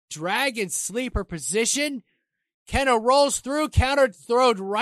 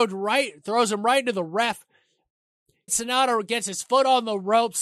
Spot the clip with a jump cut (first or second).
second